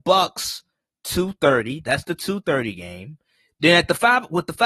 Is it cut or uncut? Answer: uncut